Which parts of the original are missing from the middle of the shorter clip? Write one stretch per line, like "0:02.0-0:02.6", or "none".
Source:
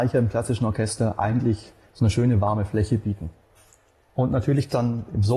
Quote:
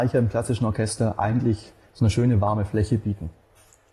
none